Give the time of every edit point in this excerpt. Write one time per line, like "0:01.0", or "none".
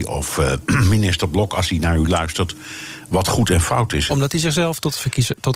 0:04.1